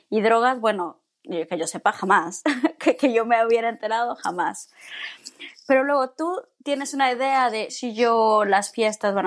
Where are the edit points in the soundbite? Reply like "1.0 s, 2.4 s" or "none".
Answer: 7.7 s